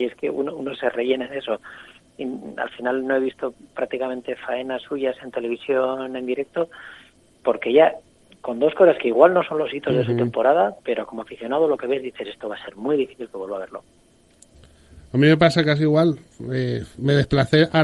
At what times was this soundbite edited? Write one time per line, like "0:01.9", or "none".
none

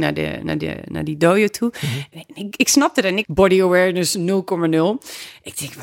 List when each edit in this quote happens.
0:02.1
0:03.2

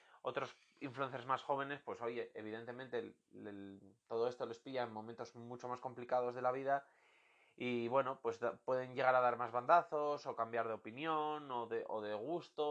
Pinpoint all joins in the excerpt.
none

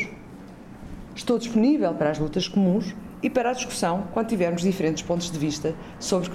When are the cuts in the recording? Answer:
0:01.1

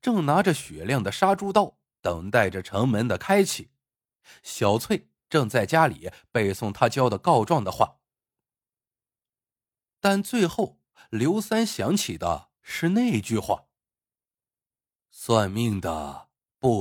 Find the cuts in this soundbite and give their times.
none

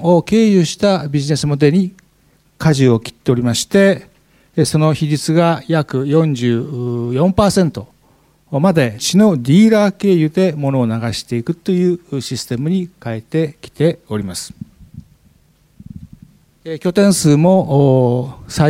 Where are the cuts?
0:09.0

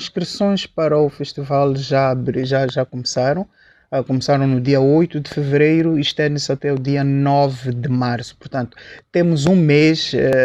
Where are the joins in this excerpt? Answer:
none

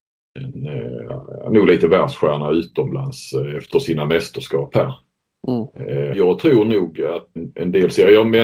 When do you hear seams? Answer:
0:06.1
0:07.4

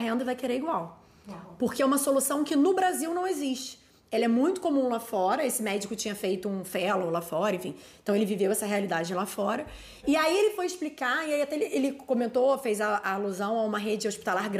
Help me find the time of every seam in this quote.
0:10.0

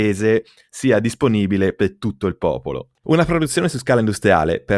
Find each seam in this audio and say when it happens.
0:03.0

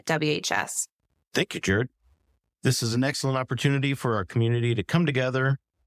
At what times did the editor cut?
0:01.3

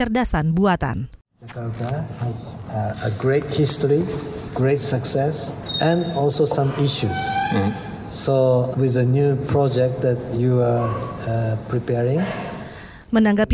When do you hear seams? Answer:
0:08.7

